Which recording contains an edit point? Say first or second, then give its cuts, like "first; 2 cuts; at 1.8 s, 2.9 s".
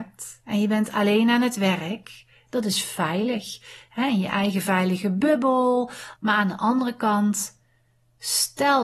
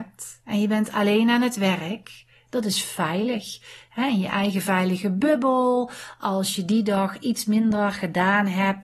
first; 1 cut; at 6.2 s